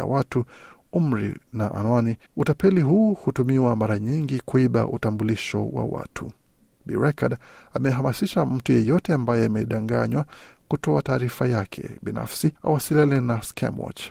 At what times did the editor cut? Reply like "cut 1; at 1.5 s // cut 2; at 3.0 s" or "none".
cut 1; at 2.3 s // cut 2; at 12.6 s